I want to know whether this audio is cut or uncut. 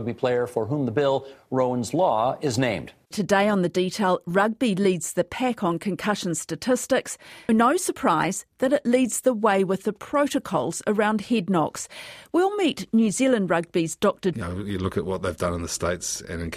cut